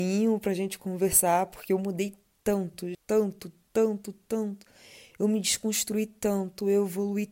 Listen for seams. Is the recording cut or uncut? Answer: cut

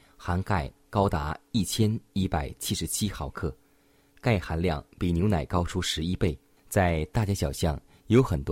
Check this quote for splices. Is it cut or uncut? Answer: cut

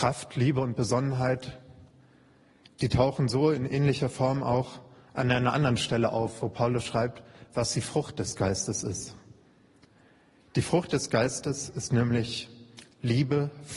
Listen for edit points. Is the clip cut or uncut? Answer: uncut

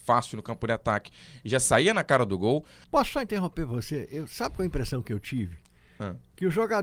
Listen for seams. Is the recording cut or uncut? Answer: cut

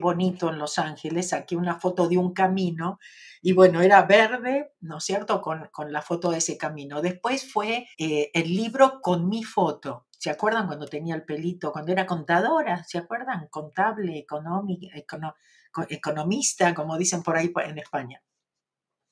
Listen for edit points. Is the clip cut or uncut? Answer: cut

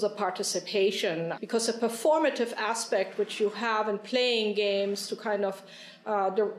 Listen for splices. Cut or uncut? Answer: cut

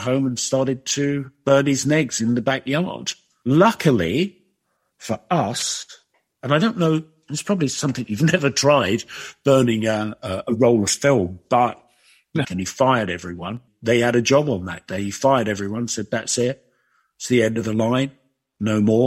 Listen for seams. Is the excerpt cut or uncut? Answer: cut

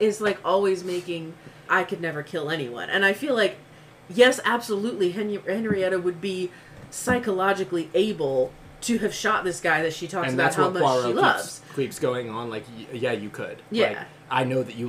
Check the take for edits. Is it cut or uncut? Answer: cut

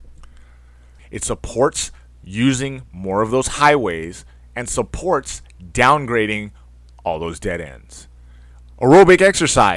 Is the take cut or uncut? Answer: cut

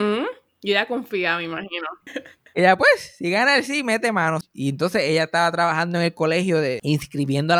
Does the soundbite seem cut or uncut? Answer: cut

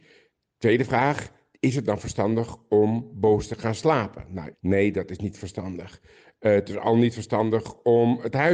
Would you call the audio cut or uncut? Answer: cut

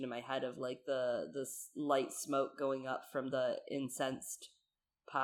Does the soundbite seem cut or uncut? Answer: uncut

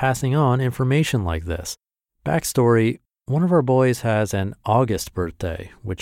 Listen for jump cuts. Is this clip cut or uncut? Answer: cut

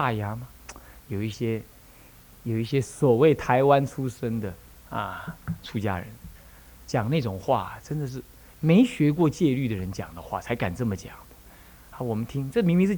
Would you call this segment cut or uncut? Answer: cut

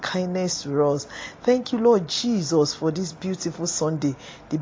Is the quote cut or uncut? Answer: uncut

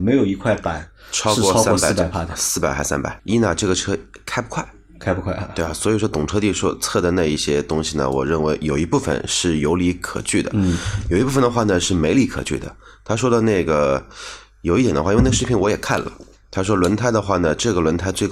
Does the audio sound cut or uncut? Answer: cut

